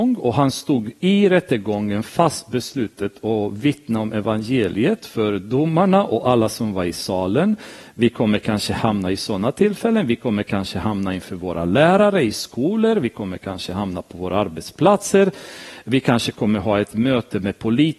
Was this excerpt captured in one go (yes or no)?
yes